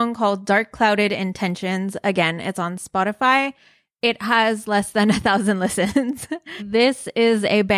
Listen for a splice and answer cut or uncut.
cut